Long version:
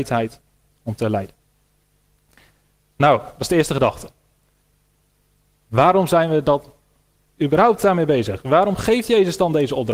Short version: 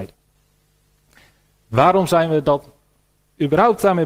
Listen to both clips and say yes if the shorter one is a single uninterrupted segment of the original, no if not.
no